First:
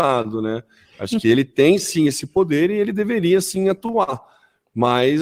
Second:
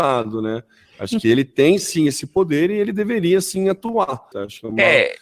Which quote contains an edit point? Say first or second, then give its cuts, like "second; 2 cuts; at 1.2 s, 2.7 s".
second; 1 cut; at 4.3 s